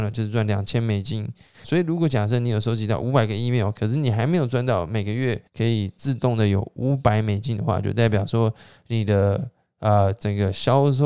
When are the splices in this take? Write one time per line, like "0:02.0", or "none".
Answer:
0:01.6
0:05.5